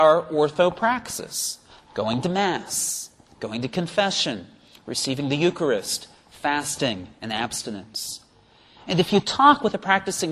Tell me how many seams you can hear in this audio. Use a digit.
0